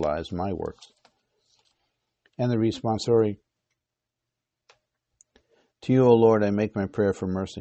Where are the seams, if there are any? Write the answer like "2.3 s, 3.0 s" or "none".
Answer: none